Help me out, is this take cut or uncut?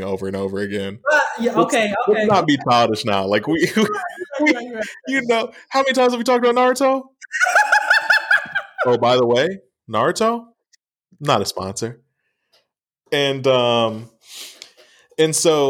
uncut